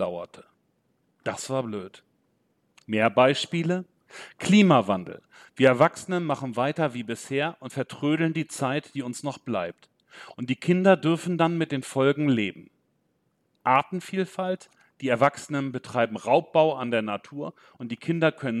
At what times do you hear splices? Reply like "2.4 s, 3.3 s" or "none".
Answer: none